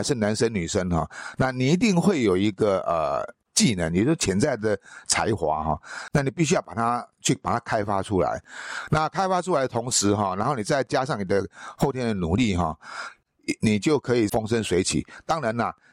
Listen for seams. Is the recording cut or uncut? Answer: uncut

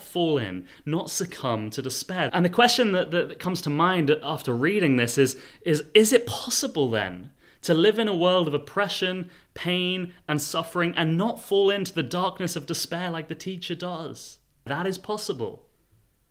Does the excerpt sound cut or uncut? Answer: cut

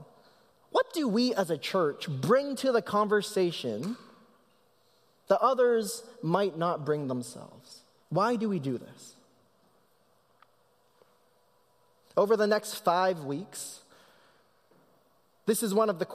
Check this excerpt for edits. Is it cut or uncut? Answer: cut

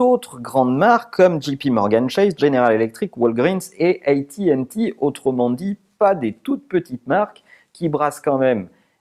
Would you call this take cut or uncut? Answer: uncut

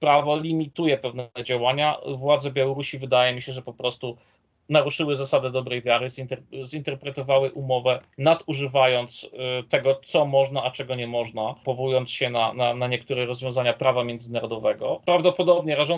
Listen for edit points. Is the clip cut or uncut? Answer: uncut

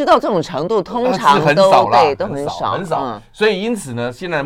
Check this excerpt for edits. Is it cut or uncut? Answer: uncut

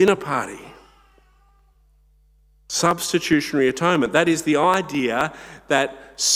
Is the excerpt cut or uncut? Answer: uncut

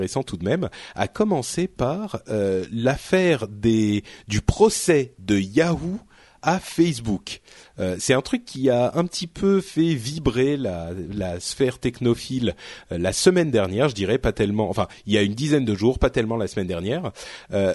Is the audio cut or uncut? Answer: uncut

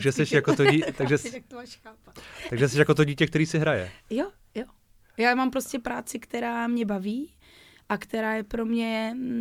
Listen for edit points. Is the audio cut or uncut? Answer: uncut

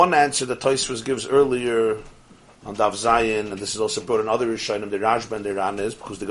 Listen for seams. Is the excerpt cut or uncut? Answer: uncut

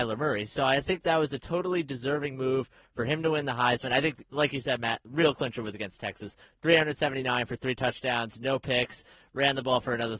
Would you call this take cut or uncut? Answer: uncut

